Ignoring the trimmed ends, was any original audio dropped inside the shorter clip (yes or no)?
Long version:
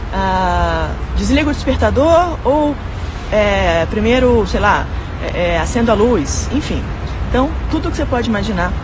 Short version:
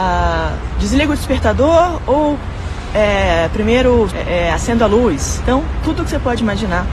yes